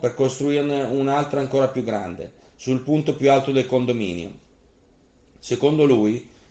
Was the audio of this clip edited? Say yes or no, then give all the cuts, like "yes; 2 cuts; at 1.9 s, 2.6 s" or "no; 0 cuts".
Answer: no; 0 cuts